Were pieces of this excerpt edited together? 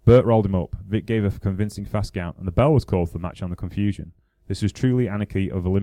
no; 0 cuts

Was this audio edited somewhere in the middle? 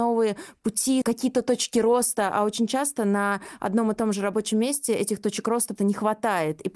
yes; 2 cuts; at 1.0 s, 5.8 s

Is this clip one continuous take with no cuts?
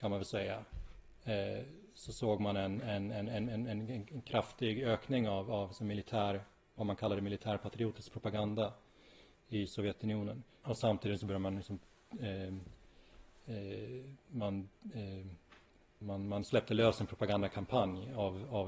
no; 2 cuts; at 10.6 s, 16.0 s

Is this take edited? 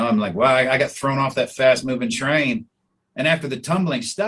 no; 0 cuts

